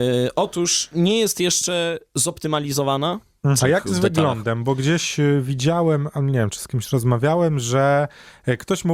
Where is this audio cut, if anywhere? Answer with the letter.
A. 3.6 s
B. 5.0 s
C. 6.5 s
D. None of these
A